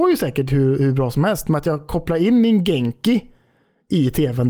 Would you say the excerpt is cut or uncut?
uncut